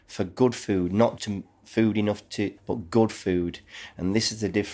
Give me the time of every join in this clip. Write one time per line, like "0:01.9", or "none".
0:01.2
0:02.6